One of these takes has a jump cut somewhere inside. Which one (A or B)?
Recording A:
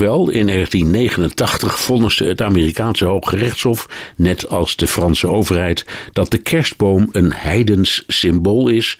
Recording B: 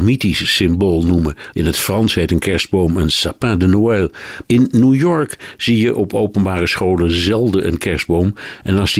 B